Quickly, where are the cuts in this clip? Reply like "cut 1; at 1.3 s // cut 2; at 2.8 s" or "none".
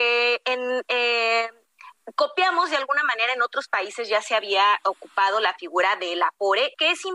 none